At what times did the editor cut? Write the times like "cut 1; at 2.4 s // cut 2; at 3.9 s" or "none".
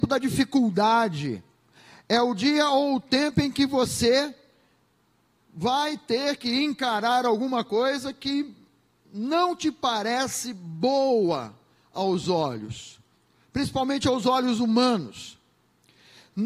none